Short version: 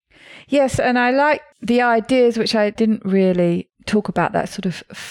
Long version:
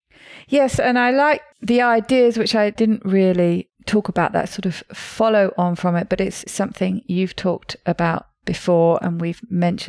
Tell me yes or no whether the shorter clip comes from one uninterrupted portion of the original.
yes